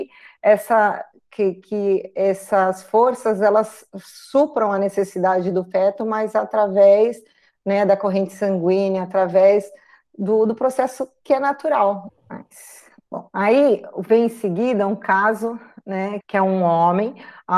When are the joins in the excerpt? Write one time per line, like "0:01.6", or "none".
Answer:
0:12.1
0:16.2